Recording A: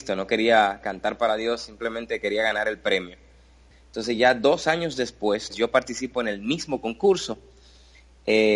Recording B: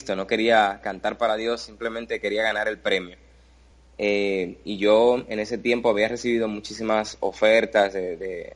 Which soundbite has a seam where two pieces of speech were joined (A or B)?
A